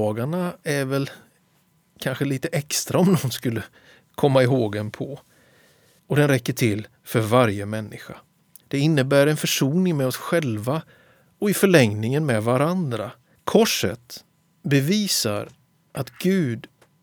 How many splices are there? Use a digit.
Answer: 3